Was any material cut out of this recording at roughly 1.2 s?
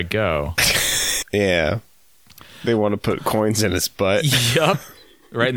yes; 1 cut; at 1.2 s

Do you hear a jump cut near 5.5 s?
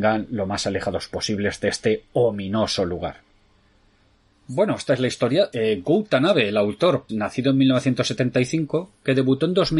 yes; 2 cuts; at 5.5 s, 7.1 s

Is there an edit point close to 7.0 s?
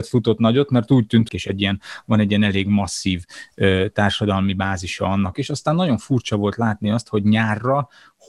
no; 2 cuts; at 1.3 s, 5.3 s

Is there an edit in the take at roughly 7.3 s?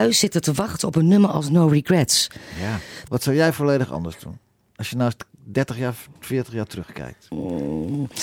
no; 1 cut; at 3.1 s

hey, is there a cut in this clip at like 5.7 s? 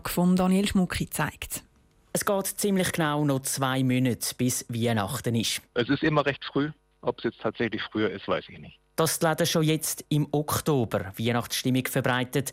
yes; 1 cut; at 5.7 s

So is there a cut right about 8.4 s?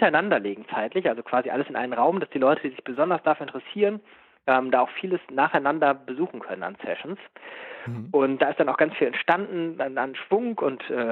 yes; 1 cut; at 8.4 s

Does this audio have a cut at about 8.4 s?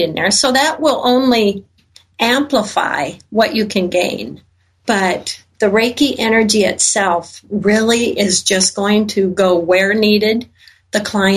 no; 0 cuts

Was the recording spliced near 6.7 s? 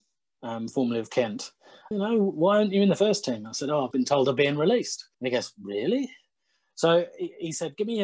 no; 3 cuts; at 1.9 s, 3.9 s, 5.1 s

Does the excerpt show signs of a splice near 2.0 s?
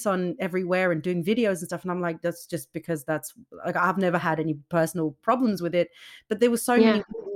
no; 0 cuts

